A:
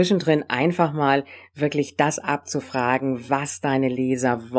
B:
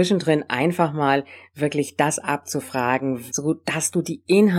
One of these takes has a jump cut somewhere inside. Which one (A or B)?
B